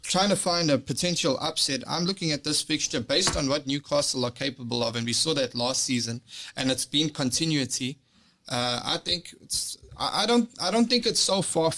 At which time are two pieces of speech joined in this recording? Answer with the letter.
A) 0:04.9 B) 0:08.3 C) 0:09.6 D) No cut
D